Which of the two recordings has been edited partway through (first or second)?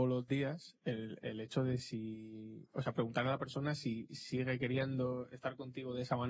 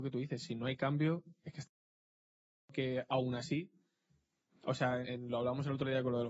second